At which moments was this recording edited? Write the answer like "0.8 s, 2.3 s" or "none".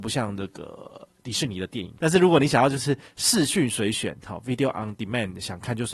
2.0 s